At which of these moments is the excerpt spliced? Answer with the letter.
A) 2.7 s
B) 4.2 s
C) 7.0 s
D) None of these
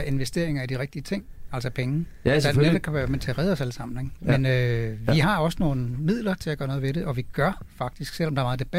B